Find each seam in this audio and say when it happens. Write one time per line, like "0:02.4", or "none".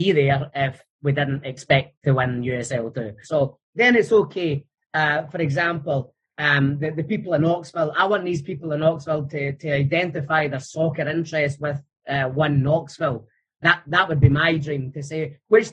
0:03.2